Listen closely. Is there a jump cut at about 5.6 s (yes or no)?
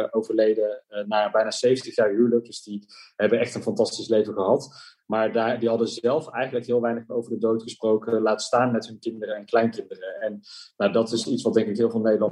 no